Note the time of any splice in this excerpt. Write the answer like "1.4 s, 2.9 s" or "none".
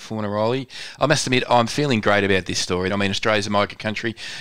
2.9 s